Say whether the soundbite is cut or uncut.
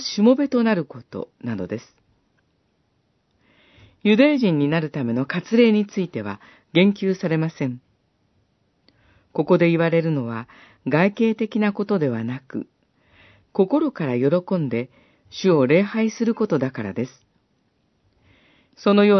uncut